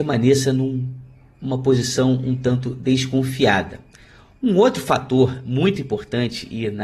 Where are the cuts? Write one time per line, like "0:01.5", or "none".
none